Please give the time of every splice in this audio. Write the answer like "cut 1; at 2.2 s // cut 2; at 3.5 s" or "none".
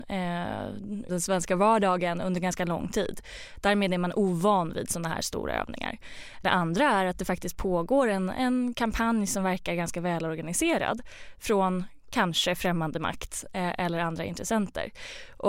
cut 1; at 1.1 s // cut 2; at 6.4 s